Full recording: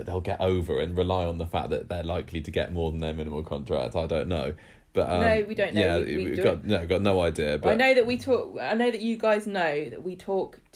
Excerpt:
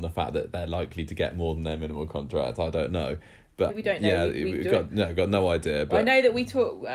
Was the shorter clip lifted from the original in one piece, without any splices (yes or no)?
no